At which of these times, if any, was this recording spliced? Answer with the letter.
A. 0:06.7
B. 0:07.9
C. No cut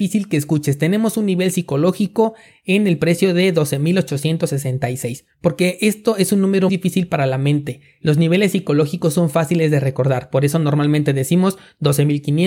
A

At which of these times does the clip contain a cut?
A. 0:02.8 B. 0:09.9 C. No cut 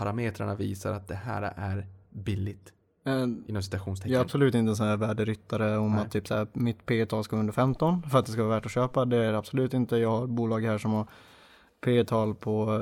C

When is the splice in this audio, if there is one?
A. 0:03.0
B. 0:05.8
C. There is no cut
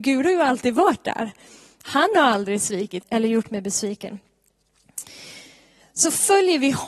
A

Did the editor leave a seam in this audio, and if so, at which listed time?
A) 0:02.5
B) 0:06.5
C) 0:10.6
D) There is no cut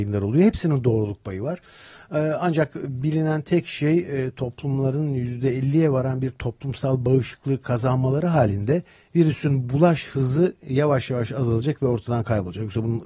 D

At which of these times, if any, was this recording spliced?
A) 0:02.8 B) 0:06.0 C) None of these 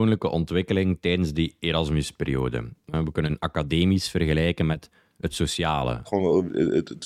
B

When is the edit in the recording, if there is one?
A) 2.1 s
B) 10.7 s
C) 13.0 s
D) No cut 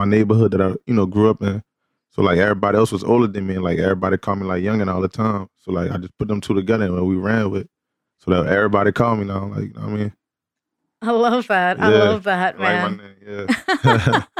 D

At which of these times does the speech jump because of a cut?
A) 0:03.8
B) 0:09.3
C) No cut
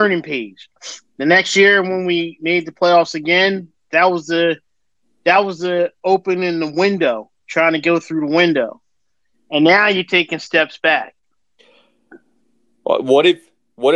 C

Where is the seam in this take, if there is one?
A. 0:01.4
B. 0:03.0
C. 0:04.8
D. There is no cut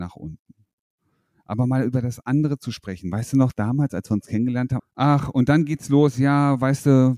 C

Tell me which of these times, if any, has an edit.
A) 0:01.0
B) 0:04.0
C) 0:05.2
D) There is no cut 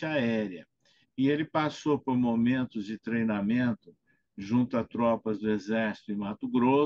A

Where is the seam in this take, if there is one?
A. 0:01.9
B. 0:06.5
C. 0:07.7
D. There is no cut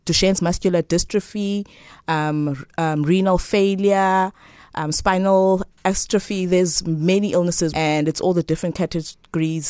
C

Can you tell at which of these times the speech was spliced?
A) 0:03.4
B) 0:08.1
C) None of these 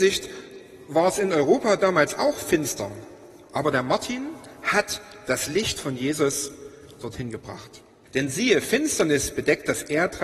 B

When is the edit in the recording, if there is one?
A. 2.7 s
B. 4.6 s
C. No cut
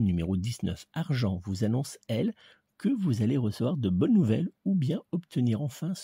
C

